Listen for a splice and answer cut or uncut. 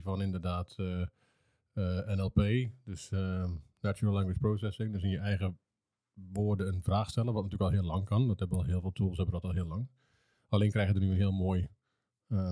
uncut